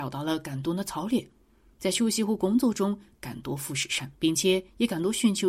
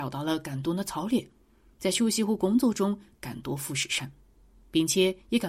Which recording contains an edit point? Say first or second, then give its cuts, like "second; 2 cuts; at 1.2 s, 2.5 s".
first; 1 cut; at 4.2 s